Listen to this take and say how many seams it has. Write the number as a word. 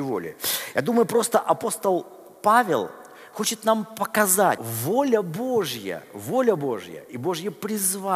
one